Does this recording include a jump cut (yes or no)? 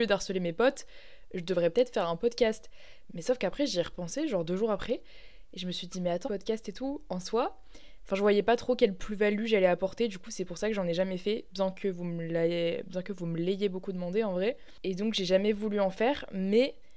yes